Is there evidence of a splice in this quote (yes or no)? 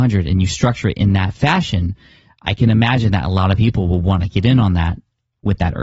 no